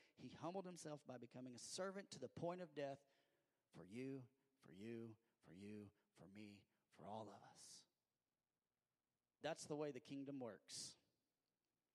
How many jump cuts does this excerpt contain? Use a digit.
1